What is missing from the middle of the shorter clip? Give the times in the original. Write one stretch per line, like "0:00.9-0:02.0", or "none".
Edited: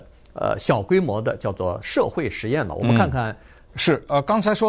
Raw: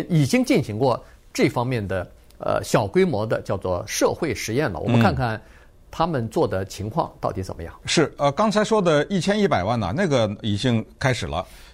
0:05.7-0:07.8

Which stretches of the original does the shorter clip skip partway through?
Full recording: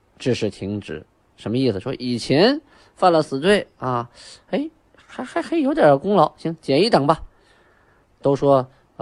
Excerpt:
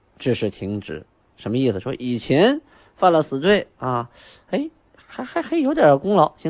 none

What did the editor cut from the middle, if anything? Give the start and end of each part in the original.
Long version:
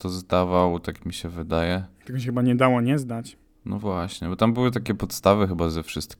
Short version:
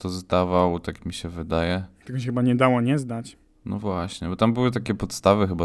none

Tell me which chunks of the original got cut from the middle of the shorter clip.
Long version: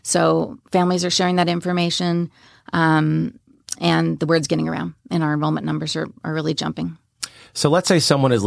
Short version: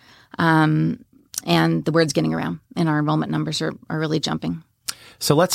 none

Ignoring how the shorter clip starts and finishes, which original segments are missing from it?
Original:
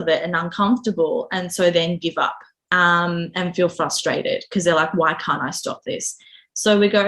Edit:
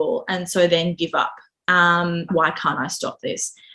0:03.3-0:04.9

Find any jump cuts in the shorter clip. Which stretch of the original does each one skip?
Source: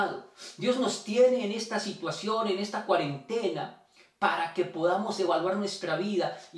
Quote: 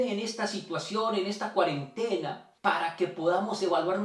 0:03.9-0:04.1

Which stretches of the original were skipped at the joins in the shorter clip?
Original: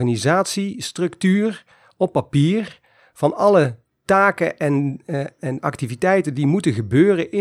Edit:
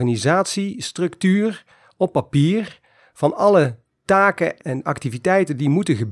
0:04.6-0:05.3

